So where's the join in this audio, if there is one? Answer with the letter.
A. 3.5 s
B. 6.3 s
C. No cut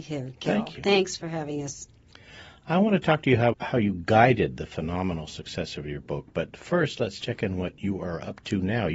A